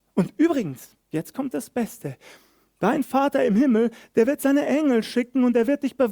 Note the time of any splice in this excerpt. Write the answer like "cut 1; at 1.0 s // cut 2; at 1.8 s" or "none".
cut 1; at 1.0 s